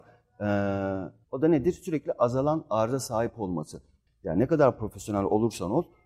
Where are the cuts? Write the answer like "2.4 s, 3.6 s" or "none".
1.2 s, 4.1 s